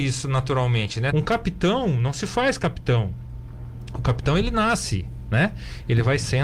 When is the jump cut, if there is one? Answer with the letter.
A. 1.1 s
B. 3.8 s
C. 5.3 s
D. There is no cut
A